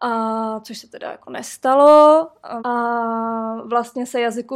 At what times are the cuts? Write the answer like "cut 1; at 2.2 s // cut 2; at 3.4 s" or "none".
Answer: cut 1; at 2.6 s